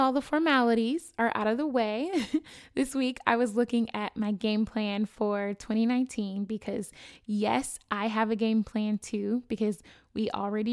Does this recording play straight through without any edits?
yes; 0 cuts

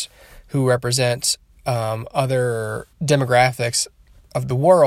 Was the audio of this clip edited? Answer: yes; 1 cut; at 2.9 s

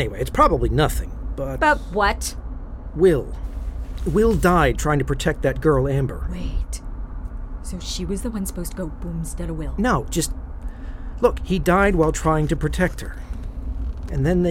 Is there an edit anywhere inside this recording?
no; 0 cuts

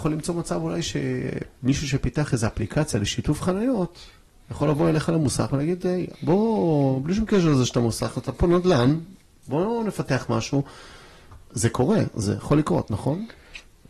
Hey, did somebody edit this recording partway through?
yes; 1 cut; at 6.1 s

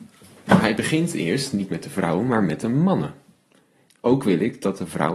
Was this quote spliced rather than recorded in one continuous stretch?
yes; 1 cut; at 3.9 s

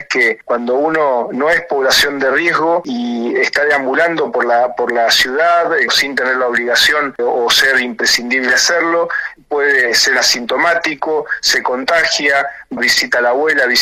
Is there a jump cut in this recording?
yes; 3 cuts; at 5.9 s, 7.2 s, 12.8 s

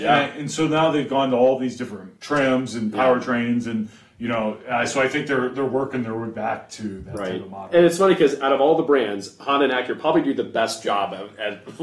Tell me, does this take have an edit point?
yes; 1 cut; at 2.2 s

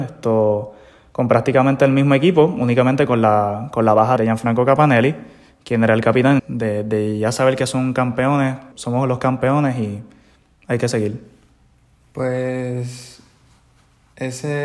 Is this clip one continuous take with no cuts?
no; 3 cuts; at 4.2 s, 6.4 s, 8.7 s

